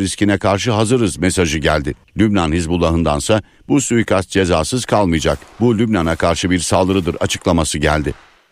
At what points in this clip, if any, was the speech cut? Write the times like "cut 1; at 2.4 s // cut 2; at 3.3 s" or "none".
cut 1; at 2.0 s